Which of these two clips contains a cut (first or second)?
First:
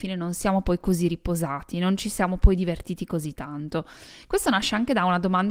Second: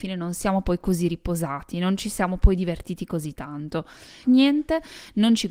second